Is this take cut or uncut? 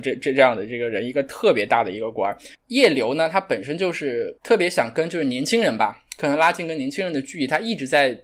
cut